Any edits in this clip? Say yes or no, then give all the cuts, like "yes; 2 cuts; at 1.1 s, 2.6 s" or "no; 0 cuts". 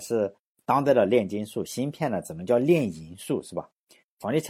no; 0 cuts